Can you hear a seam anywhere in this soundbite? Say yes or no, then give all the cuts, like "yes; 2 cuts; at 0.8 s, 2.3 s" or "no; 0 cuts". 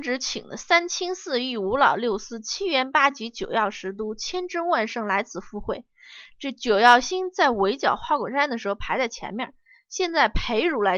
no; 0 cuts